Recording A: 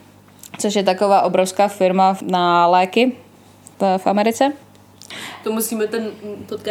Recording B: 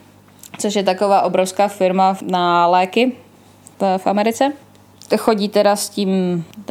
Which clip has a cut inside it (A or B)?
A